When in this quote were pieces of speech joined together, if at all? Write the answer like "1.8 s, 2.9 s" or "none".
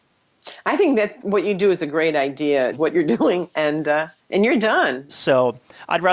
2.7 s, 5.1 s